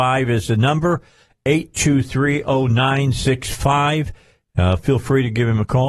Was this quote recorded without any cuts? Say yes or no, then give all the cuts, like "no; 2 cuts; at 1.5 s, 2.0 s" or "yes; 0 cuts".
yes; 0 cuts